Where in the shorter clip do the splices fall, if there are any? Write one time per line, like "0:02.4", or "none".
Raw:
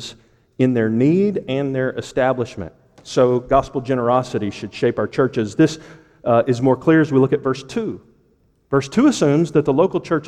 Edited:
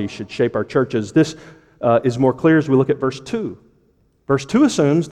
none